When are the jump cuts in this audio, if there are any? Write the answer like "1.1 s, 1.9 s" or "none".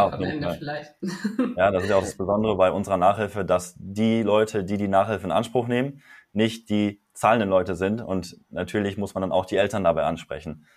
none